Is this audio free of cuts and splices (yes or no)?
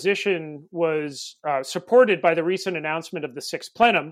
yes